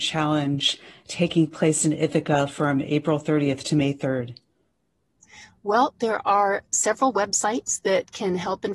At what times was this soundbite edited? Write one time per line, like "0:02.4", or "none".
none